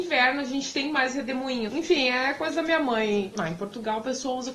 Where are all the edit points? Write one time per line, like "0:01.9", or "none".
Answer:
0:01.7
0:03.3